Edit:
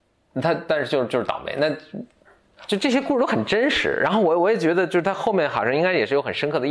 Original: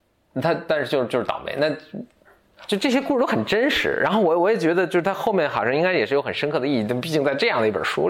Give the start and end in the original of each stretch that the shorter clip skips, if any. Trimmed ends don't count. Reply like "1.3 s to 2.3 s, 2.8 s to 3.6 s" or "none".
none